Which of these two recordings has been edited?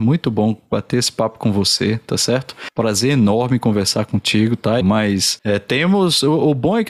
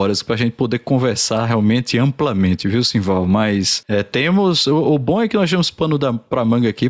first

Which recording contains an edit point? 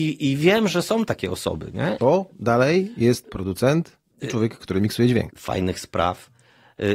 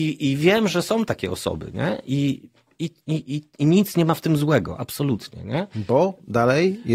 first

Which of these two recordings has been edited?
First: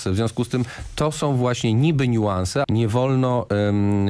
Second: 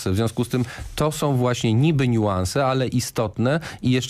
first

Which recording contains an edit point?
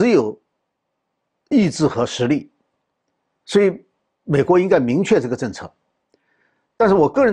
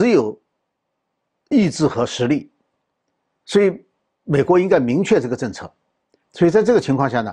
second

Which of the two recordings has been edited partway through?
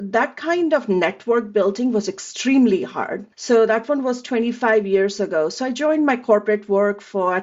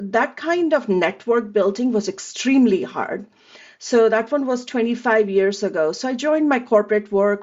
first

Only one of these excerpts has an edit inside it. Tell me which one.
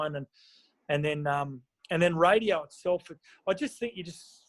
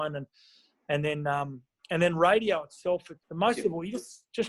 second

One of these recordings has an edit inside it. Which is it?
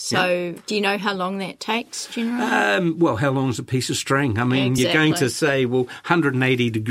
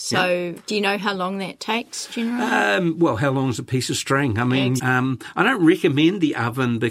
second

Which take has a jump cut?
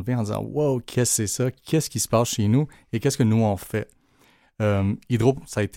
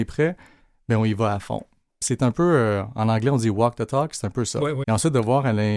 second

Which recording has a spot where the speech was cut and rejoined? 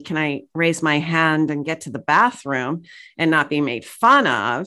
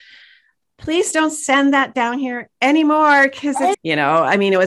second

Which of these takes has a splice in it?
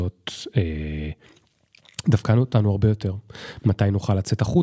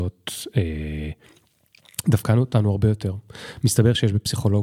first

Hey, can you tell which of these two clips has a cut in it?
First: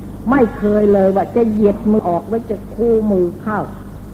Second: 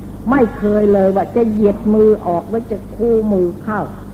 first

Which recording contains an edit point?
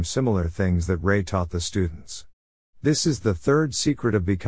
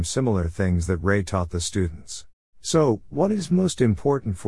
second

